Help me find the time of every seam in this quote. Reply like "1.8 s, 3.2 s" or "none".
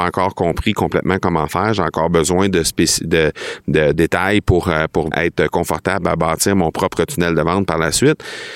3.9 s, 5.1 s